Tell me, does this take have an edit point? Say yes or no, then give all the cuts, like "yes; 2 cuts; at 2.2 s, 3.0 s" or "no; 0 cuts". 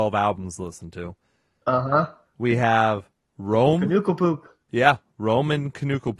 no; 0 cuts